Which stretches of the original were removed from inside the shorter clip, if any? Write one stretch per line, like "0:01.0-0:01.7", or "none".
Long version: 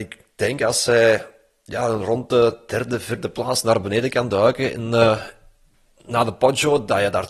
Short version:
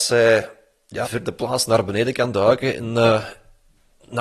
0:01.8-0:03.0